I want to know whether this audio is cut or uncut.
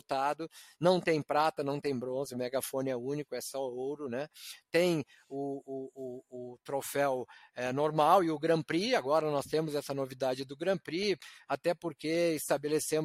uncut